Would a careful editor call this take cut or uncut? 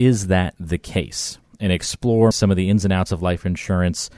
cut